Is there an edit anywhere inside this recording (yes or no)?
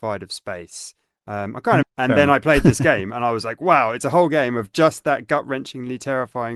yes